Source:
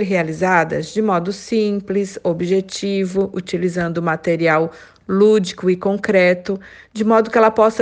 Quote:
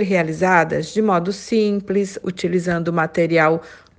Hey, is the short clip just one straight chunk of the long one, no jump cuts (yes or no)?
no